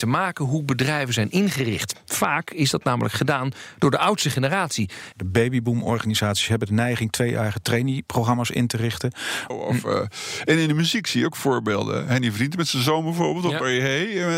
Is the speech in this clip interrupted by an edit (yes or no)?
yes